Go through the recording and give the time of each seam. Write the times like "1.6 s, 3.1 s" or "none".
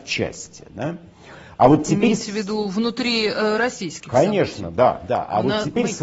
none